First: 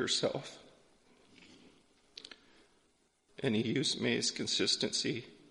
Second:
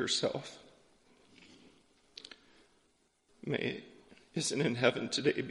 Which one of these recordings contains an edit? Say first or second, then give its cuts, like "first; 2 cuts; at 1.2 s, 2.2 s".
first; 1 cut; at 3.4 s